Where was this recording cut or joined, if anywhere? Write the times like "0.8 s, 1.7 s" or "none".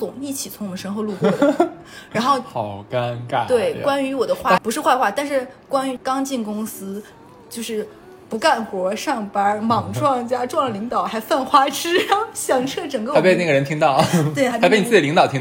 4.6 s, 6.0 s, 14.5 s